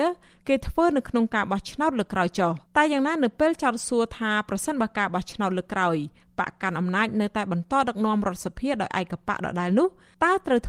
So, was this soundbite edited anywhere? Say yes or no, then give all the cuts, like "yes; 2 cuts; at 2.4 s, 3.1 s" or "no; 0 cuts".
yes; 1 cut; at 2.7 s